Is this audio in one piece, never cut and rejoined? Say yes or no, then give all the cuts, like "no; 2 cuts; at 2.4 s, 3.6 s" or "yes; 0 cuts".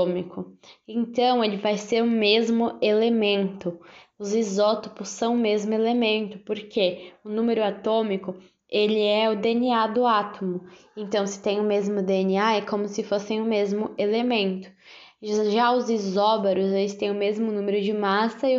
yes; 0 cuts